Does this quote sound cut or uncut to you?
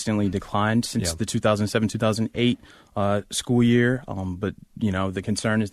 uncut